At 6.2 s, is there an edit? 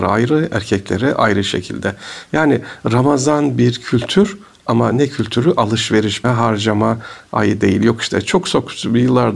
yes; 1 cut; at 6.2 s

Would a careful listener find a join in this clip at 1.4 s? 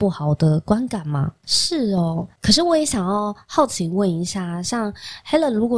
yes; 1 cut; at 1.4 s

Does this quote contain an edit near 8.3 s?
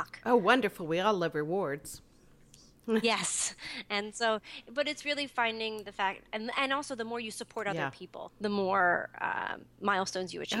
yes; 1 cut; at 8.3 s

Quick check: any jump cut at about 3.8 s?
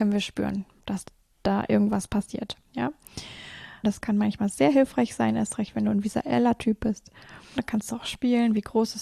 yes; 2 cuts; at 3.8 s, 7.6 s

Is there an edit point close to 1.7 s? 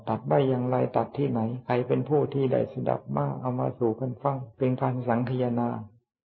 no; 1 cut; at 4.5 s

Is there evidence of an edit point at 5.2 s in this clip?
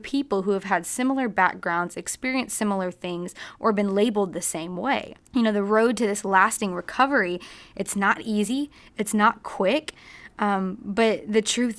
yes; 1 cut; at 5.2 s

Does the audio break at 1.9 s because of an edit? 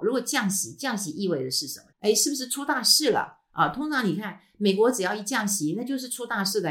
yes; 1 cut; at 1.9 s

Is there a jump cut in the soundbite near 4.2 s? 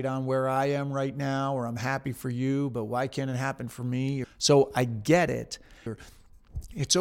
yes; 2 cuts; at 4.2 s, 5.9 s

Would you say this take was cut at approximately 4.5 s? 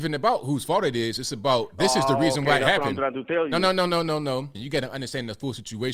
yes; 1 cut; at 4.5 s

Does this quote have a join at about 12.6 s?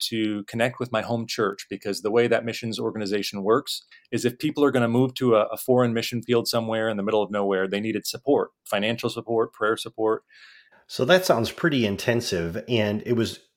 no; 1 cut; at 10.7 s

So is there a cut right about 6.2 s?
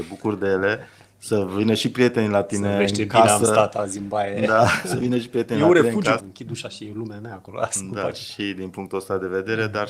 yes; 1 cut; at 6.2 s

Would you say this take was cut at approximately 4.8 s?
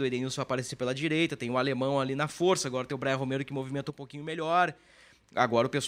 no; 0 cuts

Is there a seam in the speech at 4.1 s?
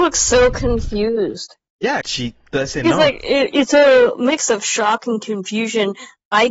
no; 1 cut; at 2.0 s

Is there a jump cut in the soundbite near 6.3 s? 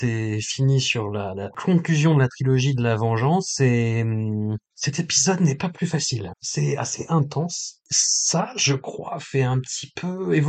yes; 1 cut; at 6.3 s

